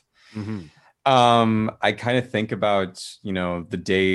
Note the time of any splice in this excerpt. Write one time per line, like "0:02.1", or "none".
none